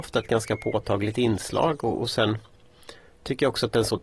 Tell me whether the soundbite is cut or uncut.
uncut